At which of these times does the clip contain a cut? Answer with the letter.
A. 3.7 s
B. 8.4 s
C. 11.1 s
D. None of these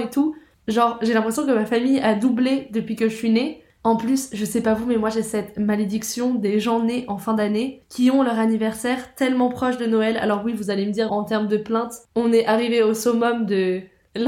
C